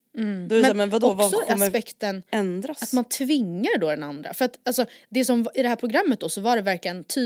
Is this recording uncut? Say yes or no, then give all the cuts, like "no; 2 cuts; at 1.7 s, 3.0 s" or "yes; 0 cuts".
yes; 0 cuts